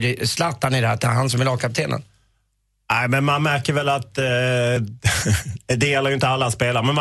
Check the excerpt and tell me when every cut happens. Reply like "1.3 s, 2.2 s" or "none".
none